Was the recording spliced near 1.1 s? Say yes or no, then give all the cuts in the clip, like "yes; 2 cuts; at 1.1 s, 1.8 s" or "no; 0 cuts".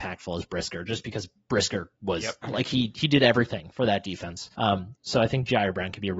no; 2 cuts; at 2.4 s, 4.5 s